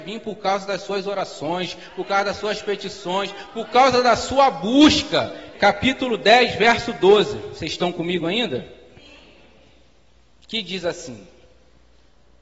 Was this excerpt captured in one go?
no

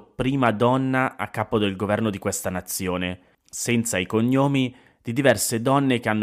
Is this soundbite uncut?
no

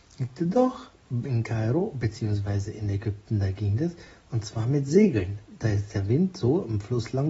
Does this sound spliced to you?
no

